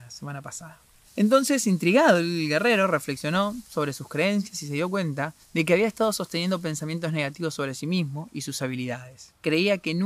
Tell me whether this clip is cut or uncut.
uncut